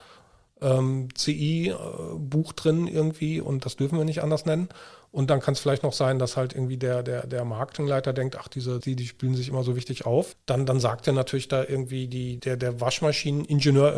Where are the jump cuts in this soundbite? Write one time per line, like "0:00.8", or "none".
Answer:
0:08.8
0:10.3
0:12.4